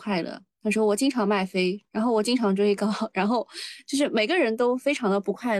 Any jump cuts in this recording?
no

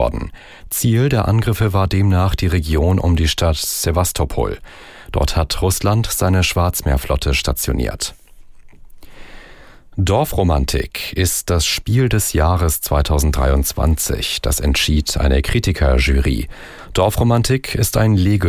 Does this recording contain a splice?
no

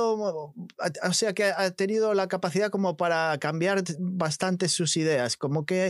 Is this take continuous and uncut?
yes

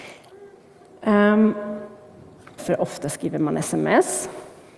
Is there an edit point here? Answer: yes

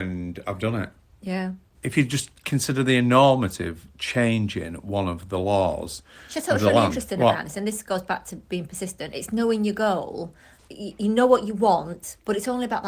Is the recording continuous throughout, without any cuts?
yes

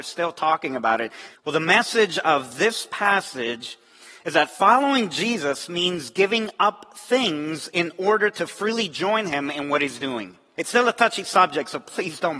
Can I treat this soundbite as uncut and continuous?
no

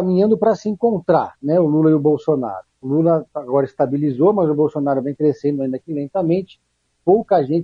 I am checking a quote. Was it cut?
yes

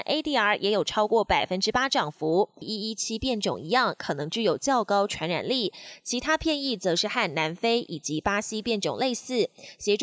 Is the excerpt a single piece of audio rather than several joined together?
no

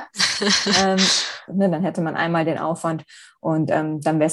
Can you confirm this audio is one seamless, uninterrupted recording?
no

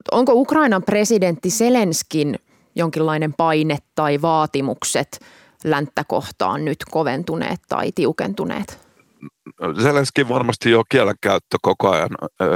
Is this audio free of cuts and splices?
yes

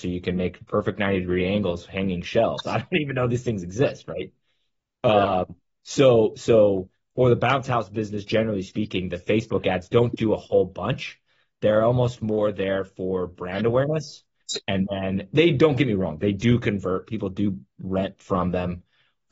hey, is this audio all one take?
yes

